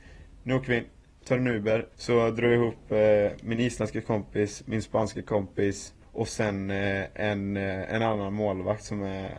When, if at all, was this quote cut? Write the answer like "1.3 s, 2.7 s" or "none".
1.9 s, 6.0 s